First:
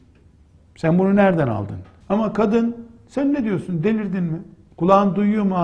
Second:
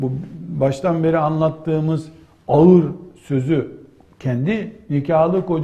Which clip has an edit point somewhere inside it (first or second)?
first